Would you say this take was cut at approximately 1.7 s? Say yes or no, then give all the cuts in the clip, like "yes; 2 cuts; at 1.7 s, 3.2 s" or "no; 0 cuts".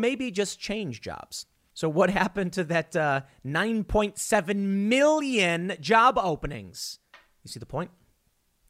yes; 1 cut; at 1.7 s